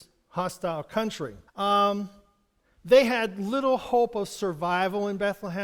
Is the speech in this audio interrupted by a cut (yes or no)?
yes